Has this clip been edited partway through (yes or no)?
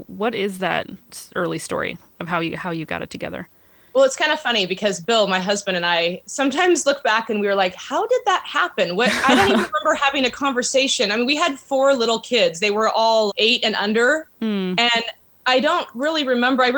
yes